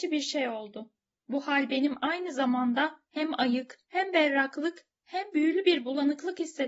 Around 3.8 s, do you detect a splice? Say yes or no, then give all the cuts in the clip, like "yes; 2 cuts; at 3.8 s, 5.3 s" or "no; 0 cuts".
yes; 2 cuts; at 1.2 s, 3.8 s